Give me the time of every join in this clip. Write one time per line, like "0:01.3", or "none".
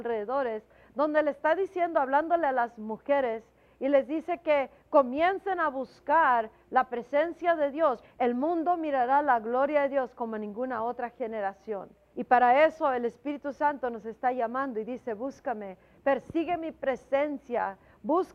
0:08.0
0:12.1